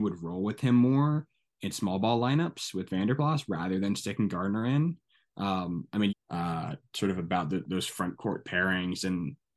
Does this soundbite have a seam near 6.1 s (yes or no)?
yes